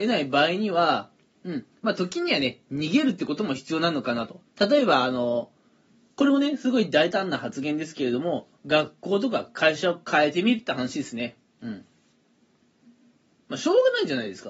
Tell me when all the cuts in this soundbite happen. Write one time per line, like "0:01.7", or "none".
0:04.5